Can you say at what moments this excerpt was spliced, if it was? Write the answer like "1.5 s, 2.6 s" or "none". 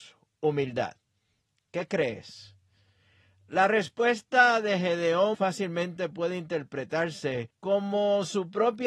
5.3 s, 7.5 s